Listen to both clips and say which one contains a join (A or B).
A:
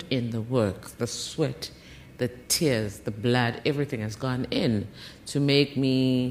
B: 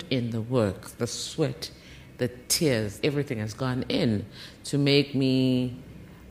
B